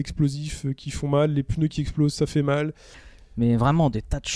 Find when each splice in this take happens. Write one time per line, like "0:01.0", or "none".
0:02.9